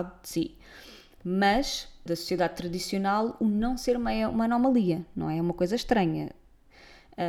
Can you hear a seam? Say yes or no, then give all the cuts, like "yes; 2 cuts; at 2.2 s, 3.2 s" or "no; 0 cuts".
yes; 1 cut; at 2.1 s